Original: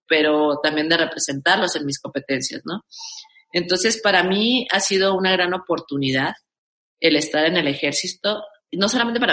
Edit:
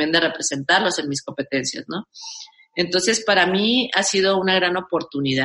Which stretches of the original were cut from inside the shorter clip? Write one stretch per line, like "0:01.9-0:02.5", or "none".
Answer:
none